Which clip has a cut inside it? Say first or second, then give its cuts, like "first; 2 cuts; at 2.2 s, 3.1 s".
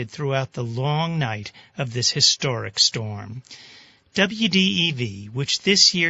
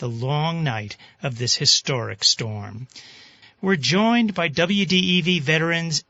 second; 1 cut; at 3.4 s